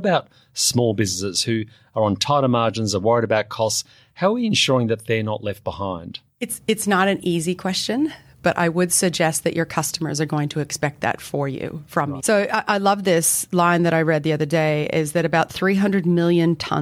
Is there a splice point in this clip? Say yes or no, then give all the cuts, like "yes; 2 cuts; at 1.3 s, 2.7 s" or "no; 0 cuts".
yes; 2 cuts; at 6.3 s, 12.2 s